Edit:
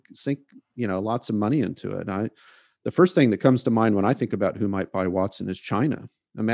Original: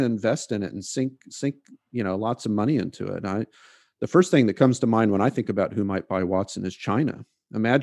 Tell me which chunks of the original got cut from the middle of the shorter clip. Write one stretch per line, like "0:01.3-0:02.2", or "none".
none